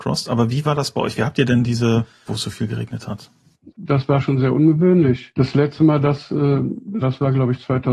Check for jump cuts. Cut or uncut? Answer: cut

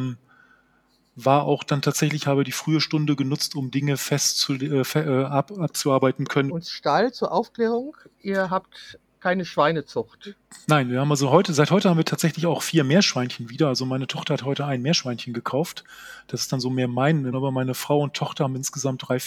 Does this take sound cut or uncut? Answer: cut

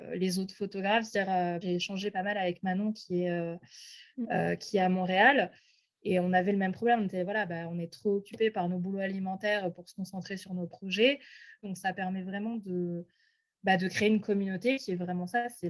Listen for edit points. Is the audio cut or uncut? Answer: cut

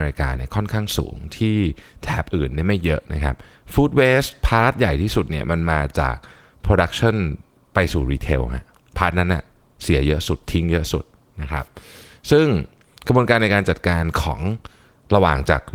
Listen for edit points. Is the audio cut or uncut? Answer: uncut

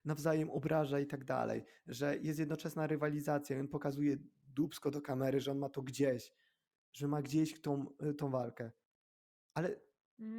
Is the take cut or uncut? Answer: uncut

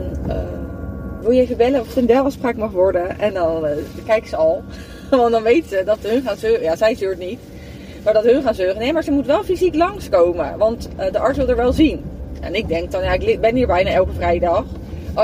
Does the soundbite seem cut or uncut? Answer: cut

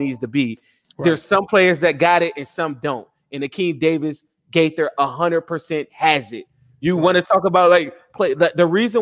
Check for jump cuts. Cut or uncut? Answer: uncut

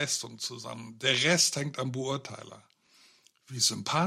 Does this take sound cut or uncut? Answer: uncut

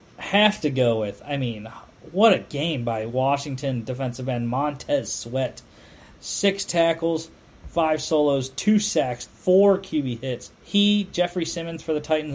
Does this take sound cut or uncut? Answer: cut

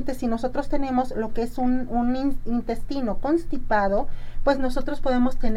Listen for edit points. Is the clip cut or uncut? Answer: uncut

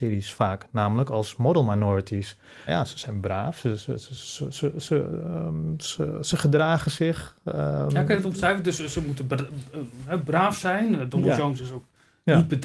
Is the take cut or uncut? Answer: cut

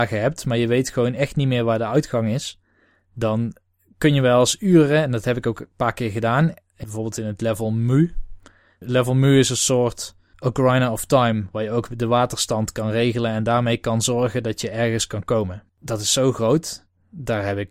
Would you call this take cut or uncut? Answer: cut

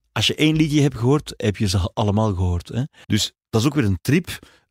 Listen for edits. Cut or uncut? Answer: cut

